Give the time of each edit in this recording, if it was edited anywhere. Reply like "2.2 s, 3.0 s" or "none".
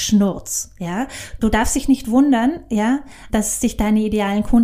1.4 s, 3.3 s